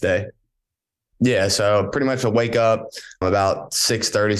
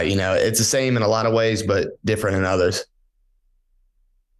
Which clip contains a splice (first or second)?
first